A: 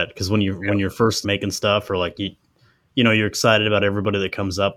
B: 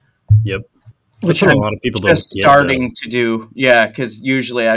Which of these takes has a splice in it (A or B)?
A